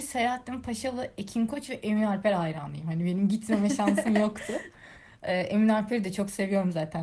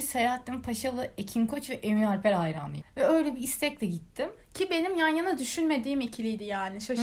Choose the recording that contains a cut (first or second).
second